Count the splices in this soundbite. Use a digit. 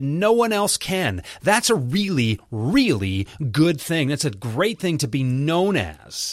0